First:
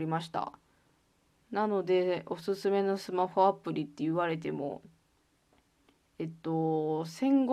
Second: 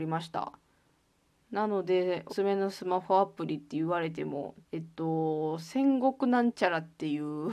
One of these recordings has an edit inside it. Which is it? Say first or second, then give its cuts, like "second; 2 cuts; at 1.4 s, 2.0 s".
second; 2 cuts; at 2.3 s, 4.6 s